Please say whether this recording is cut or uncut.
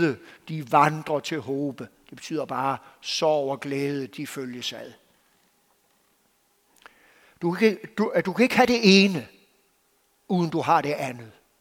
uncut